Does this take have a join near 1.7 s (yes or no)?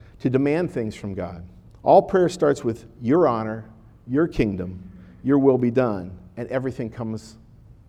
yes